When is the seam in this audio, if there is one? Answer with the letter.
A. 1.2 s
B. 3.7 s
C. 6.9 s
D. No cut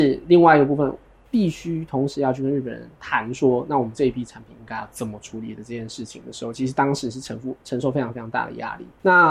D